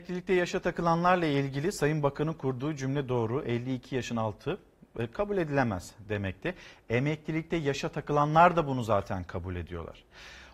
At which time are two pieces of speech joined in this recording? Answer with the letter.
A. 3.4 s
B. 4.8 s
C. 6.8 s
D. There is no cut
D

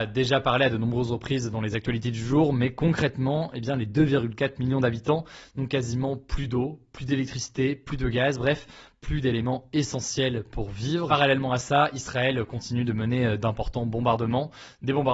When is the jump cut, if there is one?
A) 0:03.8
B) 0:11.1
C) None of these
C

